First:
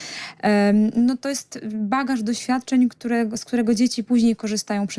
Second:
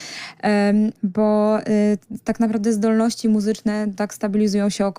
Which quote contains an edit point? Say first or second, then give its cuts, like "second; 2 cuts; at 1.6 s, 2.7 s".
second; 1 cut; at 0.9 s